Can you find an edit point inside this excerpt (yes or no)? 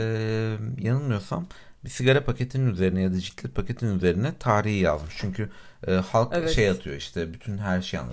no